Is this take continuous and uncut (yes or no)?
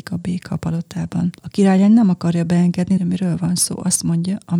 no